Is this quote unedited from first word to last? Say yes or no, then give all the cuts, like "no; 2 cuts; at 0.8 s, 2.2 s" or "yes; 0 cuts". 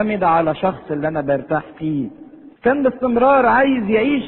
no; 1 cut; at 2.5 s